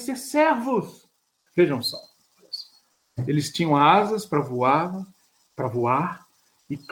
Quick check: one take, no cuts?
no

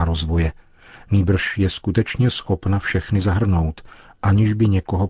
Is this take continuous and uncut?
yes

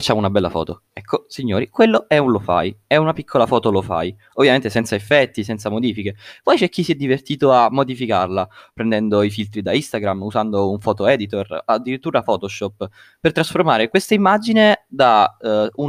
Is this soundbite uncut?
yes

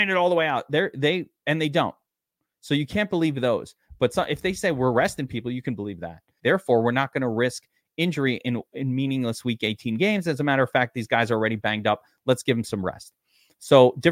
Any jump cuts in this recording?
yes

